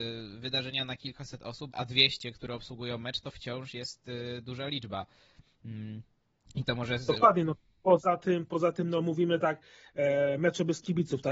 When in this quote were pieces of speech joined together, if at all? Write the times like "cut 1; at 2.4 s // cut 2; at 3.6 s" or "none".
cut 1; at 1.7 s